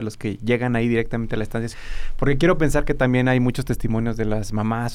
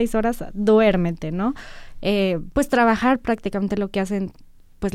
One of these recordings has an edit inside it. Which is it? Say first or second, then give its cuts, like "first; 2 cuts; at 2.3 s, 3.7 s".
first; 1 cut; at 1.7 s